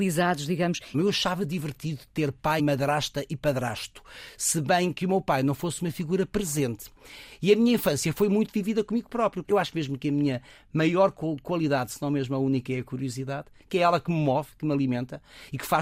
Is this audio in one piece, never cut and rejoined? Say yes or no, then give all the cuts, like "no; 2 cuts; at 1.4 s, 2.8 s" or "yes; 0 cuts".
no; 3 cuts; at 0.9 s, 2.6 s, 9.4 s